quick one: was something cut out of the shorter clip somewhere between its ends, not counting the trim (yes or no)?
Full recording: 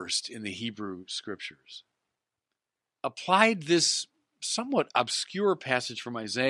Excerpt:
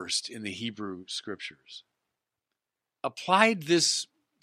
no